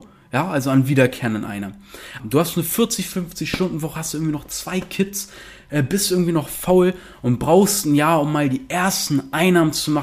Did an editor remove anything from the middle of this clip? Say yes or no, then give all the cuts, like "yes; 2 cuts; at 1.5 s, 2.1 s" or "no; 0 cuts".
yes; 1 cut; at 2.2 s